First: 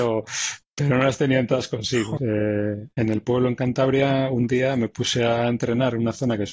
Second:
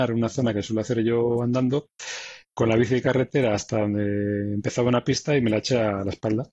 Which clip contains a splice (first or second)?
first